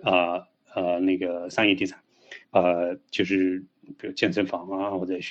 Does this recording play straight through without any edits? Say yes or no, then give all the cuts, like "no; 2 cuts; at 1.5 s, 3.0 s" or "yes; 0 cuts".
no; 1 cut; at 2.4 s